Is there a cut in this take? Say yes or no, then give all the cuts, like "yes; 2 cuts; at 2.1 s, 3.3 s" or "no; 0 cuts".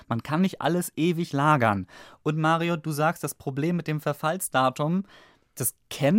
no; 0 cuts